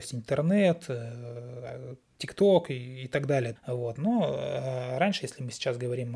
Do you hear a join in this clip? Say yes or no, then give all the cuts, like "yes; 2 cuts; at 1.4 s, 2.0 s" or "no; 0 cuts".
yes; 1 cut; at 3.6 s